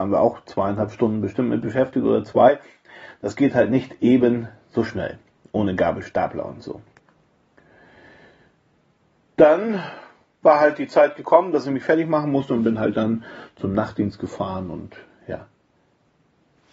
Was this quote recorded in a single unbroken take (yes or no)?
yes